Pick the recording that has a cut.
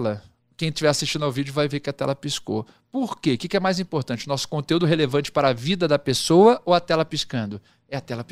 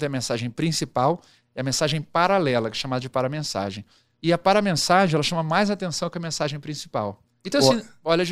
second; 1 cut; at 7.4 s

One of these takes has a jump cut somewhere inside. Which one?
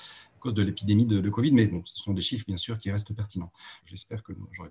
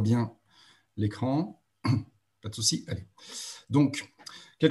first; 1 cut; at 3.8 s

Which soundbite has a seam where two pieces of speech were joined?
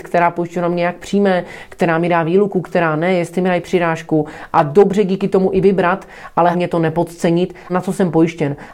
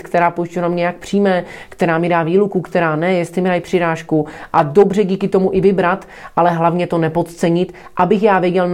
first; 2 cuts; at 6.5 s, 7.7 s

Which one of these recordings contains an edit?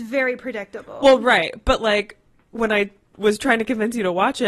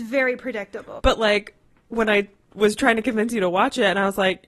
second; 1 cut; at 1.0 s

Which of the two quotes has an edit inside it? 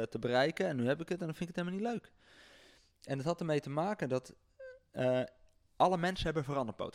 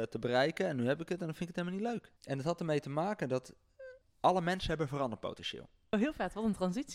second; 3 cuts; at 2.2 s, 4.0 s, 5.9 s

